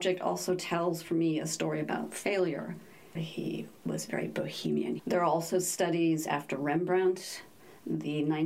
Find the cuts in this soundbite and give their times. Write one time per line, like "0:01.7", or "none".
0:03.2
0:05.0